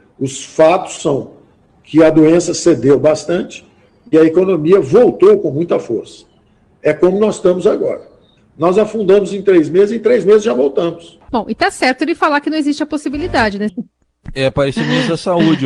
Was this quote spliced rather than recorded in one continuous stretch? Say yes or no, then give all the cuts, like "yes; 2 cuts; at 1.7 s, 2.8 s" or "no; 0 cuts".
yes; 3 cuts; at 8.4 s, 11.3 s, 13.7 s